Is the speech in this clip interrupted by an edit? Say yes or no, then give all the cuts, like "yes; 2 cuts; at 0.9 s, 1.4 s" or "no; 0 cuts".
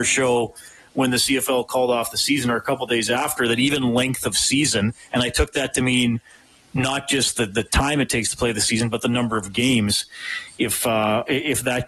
no; 0 cuts